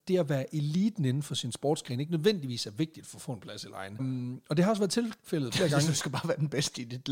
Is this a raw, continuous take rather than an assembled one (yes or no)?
no